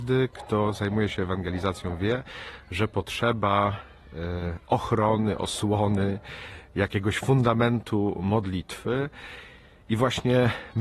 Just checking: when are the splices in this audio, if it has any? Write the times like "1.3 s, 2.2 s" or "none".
none